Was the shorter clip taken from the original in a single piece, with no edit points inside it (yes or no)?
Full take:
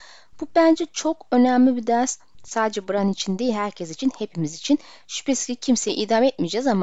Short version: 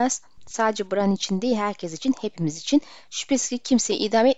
yes